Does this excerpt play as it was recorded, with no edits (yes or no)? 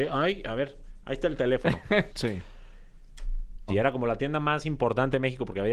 no